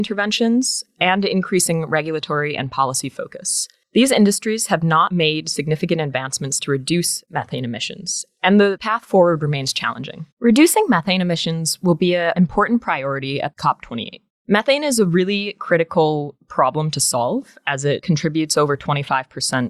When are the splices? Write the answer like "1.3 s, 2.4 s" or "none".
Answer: 3.8 s, 10.3 s